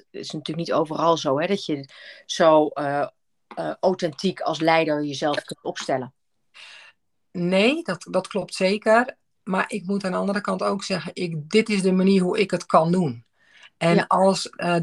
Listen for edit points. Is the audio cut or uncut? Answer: uncut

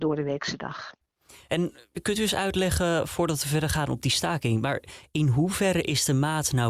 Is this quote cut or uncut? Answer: uncut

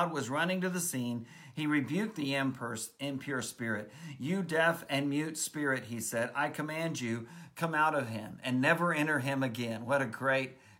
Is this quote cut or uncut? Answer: uncut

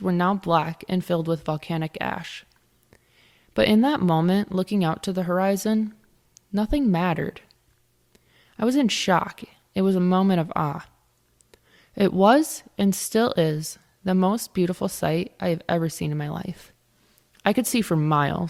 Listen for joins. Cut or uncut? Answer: uncut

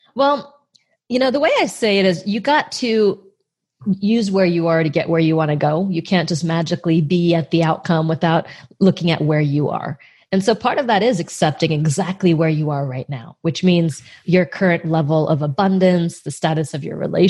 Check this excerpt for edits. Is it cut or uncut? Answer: uncut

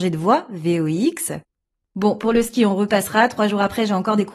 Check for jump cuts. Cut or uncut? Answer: cut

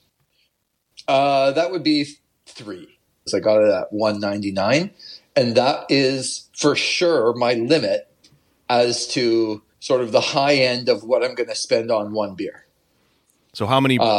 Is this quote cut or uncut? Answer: cut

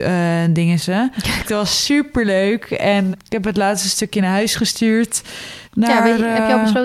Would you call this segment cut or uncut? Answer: cut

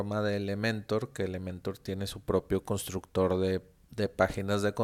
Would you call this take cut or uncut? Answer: uncut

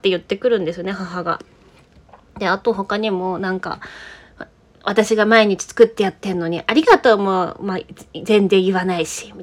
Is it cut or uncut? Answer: uncut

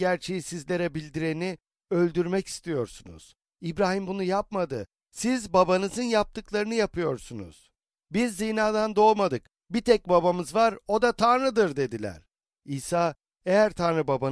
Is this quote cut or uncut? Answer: uncut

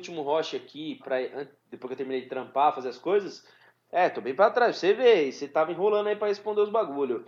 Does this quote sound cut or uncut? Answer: cut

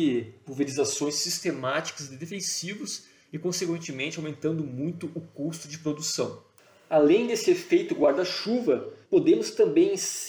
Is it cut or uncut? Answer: cut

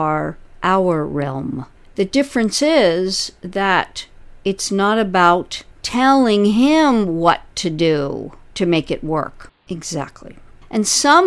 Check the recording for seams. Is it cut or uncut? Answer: cut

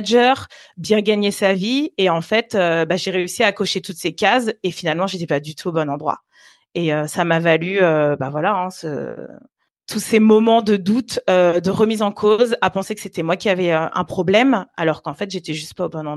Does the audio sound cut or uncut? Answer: uncut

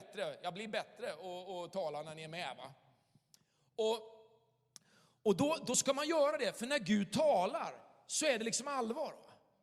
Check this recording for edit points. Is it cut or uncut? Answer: uncut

